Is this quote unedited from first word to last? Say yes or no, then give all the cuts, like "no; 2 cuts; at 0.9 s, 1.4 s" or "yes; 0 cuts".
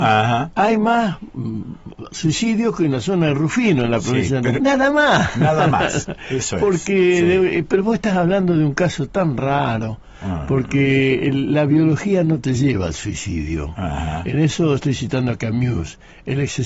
no; 1 cut; at 4.5 s